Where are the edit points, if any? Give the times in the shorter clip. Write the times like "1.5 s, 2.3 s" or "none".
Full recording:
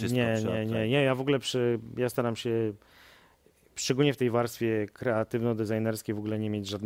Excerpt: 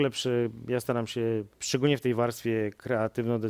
1.5 s